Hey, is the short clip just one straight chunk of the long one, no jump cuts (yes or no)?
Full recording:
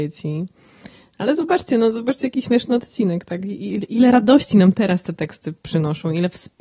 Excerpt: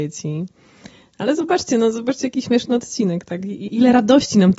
no